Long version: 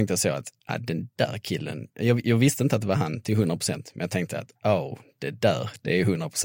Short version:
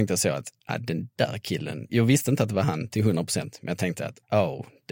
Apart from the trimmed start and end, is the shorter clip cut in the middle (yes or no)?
yes